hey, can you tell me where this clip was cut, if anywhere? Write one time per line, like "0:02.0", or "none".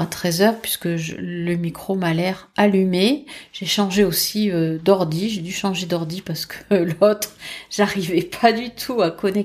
none